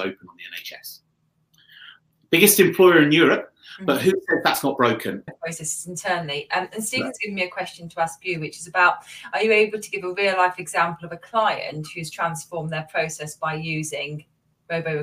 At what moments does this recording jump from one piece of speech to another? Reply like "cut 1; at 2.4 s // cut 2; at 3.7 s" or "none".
cut 1; at 5.3 s